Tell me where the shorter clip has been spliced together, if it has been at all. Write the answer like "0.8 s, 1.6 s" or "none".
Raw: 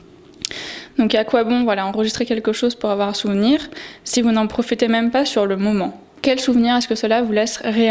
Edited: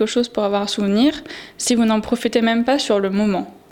none